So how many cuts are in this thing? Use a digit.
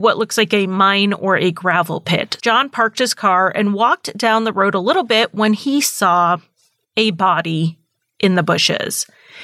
1